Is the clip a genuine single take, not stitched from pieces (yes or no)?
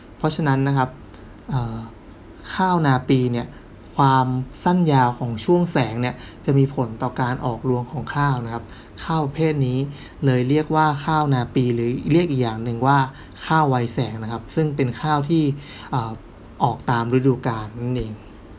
yes